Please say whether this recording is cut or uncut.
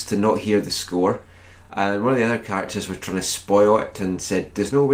uncut